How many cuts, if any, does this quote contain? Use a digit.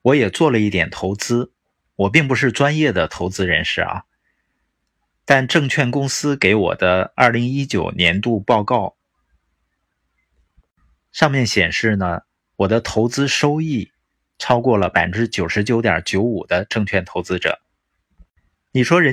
0